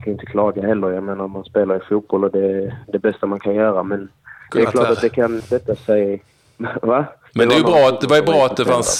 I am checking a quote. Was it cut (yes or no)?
yes